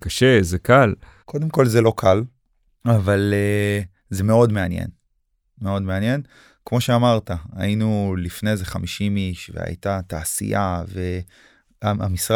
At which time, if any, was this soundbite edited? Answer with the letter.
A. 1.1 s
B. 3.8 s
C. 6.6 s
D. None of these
D